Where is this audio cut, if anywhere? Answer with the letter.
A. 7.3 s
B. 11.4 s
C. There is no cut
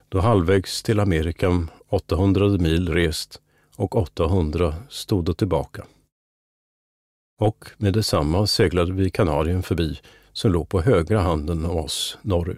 C